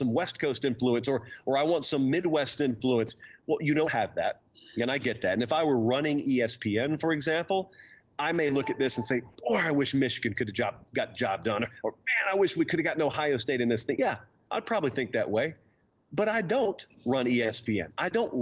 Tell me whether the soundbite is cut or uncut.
uncut